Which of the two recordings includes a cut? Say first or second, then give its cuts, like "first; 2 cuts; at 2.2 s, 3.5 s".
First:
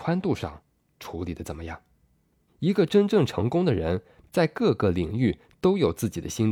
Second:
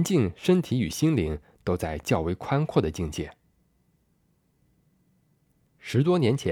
first; 2 cuts; at 2.5 s, 4.2 s